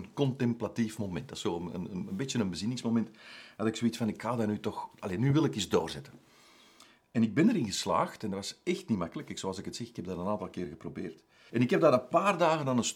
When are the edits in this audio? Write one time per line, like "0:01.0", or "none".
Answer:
0:11.5

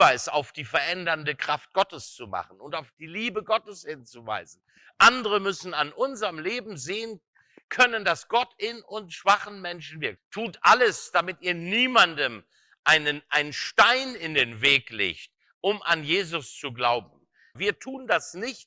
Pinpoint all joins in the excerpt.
0:10.2
0:17.5

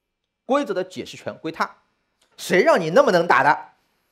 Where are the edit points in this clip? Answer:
0:02.3

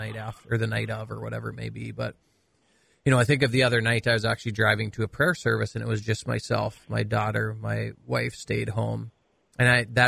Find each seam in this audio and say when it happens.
none

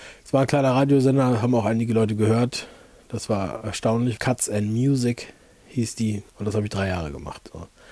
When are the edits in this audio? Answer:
0:04.2
0:06.3

